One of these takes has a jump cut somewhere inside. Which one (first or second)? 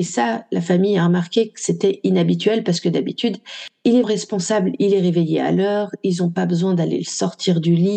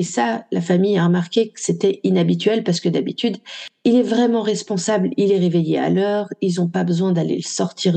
first